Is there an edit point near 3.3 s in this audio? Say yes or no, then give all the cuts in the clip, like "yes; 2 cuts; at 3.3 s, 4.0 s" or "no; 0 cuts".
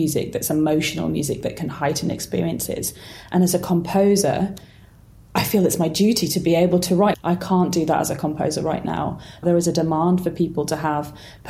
no; 2 cuts; at 7.1 s, 9.4 s